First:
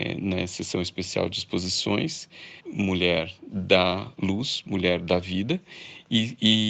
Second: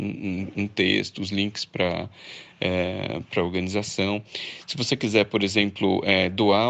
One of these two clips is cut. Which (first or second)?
first